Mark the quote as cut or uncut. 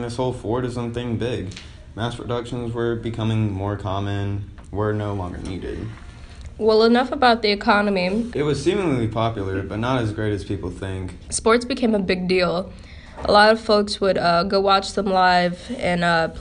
cut